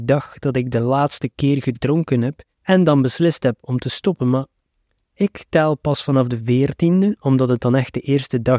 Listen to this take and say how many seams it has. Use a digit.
1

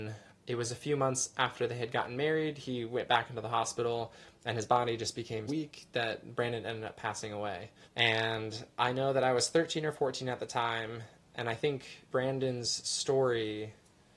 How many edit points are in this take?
3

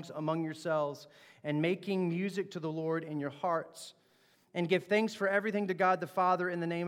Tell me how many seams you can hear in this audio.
0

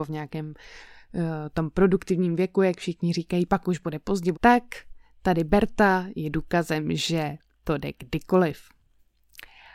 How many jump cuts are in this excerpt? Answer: 1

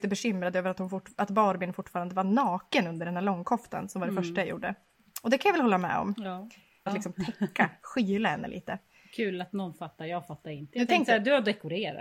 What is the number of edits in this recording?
1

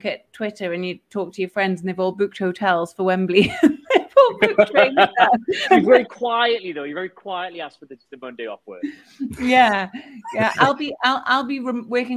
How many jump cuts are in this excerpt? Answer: 1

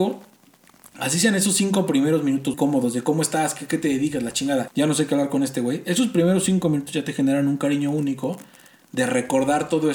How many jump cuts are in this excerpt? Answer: 2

